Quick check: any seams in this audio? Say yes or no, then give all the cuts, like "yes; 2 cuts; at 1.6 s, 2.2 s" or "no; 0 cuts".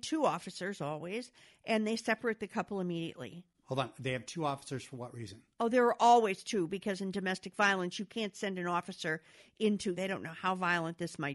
yes; 2 cuts; at 5.5 s, 9.9 s